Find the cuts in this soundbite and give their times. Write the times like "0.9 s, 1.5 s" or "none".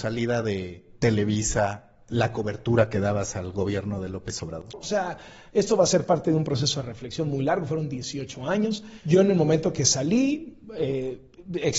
4.7 s